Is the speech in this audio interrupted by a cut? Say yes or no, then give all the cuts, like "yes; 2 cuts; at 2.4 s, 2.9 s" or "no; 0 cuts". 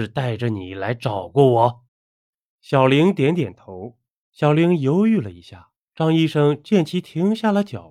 yes; 2 cuts; at 1.9 s, 4.2 s